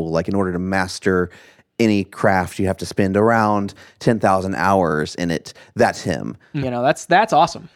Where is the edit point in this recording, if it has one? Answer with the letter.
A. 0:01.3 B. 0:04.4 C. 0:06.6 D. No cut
C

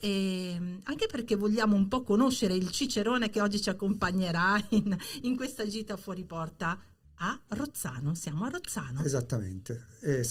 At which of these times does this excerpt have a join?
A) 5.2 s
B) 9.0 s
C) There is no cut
C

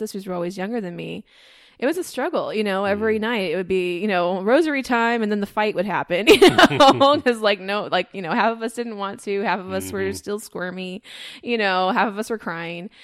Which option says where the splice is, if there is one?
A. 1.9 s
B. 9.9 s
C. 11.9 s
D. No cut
A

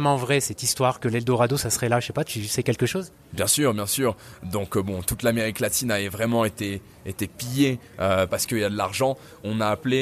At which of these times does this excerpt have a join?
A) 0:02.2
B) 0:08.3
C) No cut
B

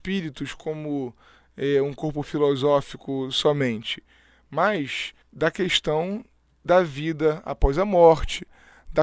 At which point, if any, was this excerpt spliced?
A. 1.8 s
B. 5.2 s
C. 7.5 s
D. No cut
B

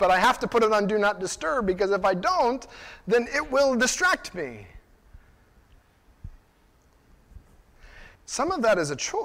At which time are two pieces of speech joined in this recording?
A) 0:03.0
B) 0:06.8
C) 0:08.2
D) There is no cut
C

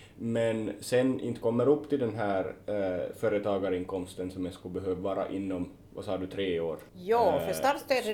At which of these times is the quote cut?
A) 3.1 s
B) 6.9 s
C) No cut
B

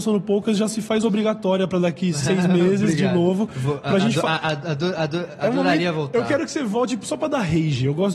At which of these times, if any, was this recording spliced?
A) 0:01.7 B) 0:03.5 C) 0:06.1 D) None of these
D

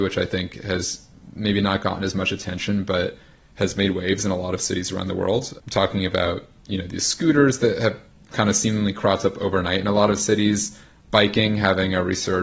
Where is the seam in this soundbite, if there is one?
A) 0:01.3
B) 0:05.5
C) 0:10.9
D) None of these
D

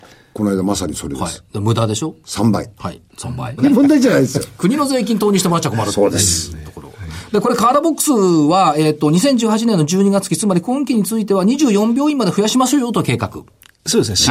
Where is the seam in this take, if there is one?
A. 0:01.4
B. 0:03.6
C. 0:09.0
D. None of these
B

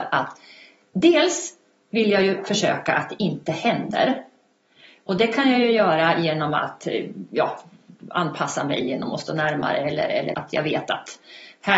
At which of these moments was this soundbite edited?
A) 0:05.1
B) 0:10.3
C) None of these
B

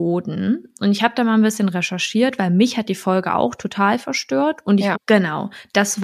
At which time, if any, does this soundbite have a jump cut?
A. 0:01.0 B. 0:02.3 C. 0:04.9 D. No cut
C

